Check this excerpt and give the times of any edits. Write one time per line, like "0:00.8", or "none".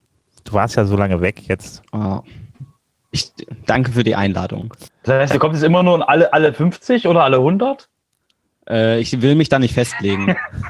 0:04.9